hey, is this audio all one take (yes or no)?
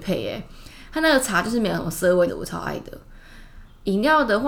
no